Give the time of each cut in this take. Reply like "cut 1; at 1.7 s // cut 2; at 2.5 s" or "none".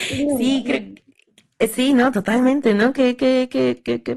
none